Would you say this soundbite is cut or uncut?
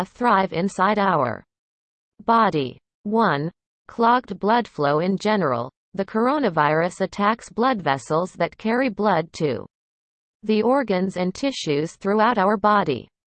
uncut